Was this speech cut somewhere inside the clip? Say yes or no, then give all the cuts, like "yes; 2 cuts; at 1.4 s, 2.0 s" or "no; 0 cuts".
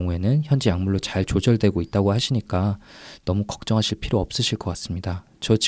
no; 0 cuts